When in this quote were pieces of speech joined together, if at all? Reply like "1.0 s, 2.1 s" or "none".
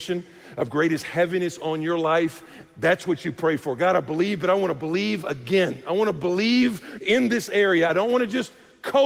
none